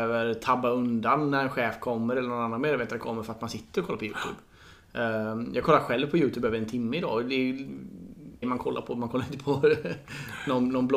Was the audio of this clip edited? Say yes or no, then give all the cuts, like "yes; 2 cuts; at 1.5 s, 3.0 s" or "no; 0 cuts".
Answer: yes; 1 cut; at 8.4 s